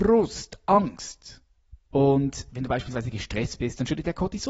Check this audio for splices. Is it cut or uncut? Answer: cut